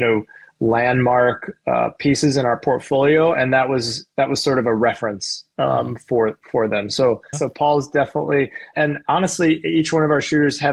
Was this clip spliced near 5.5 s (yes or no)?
no